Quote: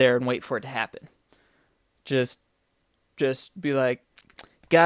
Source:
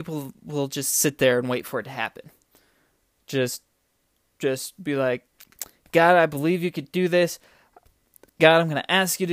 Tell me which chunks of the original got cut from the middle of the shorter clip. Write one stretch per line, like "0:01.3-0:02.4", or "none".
none